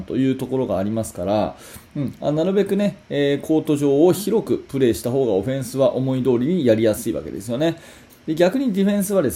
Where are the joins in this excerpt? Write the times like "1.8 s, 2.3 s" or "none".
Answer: 8.1 s

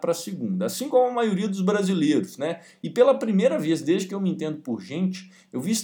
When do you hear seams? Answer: none

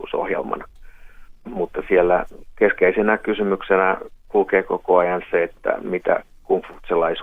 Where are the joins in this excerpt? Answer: 1.4 s

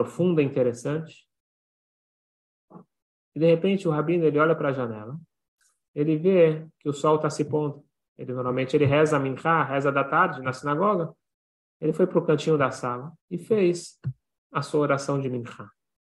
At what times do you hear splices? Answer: 11.7 s, 13.2 s

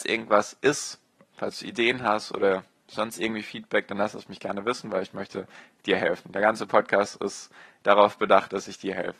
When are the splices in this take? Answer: none

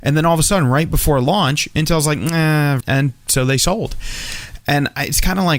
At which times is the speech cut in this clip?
2.8 s

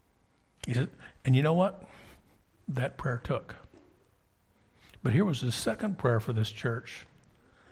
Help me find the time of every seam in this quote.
none

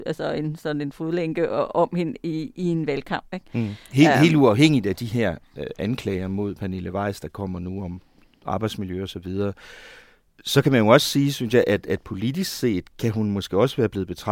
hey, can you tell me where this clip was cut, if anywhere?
none

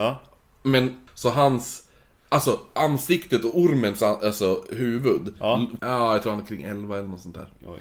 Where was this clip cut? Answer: 1.1 s, 5.8 s

